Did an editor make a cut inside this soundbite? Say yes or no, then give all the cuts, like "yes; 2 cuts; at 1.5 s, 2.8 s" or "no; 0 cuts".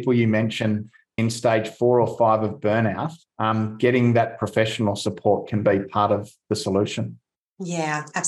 yes; 1 cut; at 1.2 s